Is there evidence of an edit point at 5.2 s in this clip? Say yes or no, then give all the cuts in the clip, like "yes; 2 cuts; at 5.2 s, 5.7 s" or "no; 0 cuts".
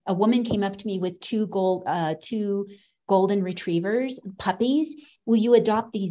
yes; 1 cut; at 5.2 s